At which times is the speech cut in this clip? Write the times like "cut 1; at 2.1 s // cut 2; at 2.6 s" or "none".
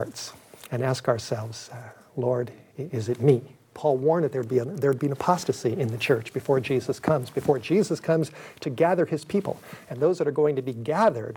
cut 1; at 3.7 s

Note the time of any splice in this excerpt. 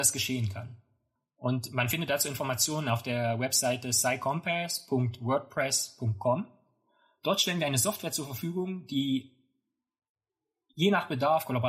cut 1; at 1.2 s

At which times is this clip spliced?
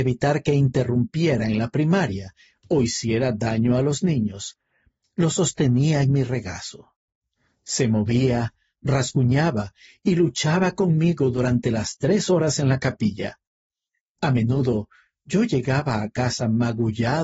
none

